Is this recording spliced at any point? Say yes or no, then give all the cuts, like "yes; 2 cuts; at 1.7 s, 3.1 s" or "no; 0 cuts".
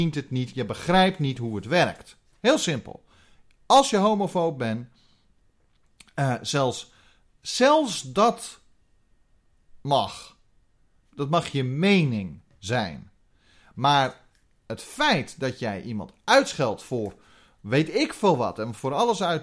no; 0 cuts